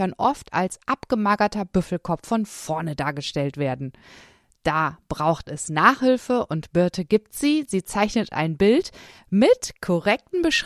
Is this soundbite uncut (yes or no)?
yes